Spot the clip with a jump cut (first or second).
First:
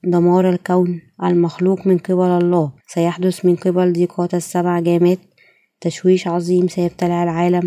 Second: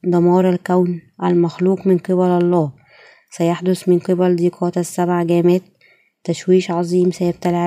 first